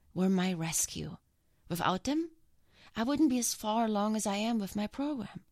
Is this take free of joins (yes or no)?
yes